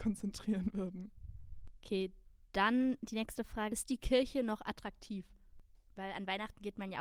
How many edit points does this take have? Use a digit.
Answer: 1